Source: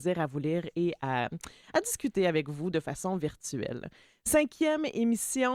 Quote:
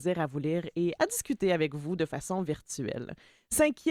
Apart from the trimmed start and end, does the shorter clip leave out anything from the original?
yes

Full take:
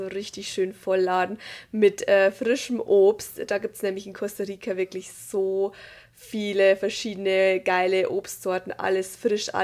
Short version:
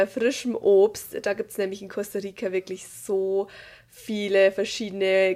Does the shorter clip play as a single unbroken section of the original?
yes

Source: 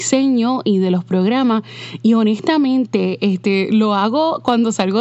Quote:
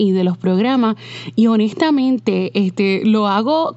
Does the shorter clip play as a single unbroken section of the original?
yes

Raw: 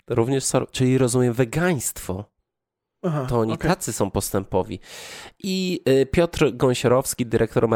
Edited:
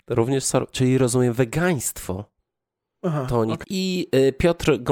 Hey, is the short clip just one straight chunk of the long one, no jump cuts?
no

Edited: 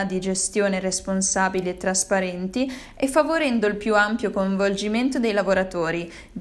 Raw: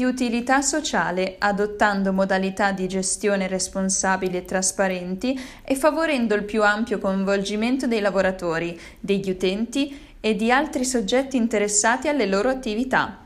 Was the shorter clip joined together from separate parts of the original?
no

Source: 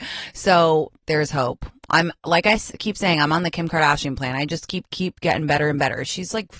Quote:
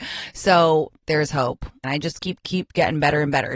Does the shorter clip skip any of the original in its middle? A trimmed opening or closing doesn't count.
yes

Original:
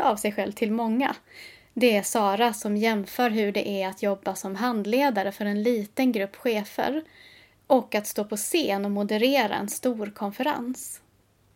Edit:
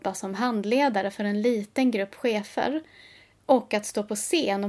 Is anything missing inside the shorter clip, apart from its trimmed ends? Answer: no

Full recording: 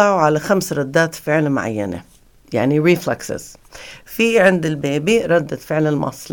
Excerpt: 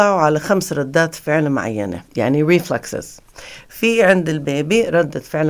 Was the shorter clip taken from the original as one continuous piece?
no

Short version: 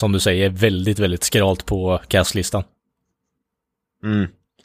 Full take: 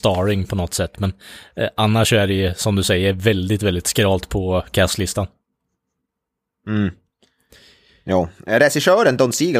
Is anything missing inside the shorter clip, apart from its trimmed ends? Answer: no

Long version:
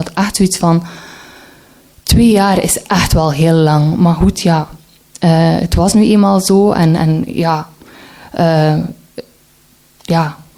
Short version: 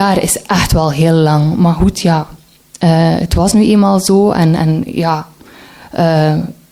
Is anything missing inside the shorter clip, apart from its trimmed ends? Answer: no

